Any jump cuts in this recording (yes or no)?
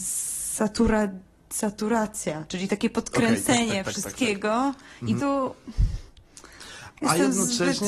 yes